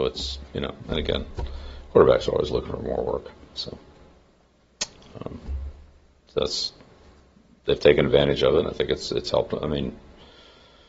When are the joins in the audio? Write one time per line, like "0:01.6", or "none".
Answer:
none